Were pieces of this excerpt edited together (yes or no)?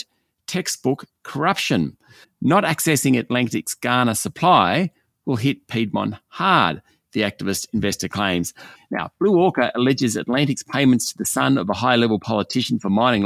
yes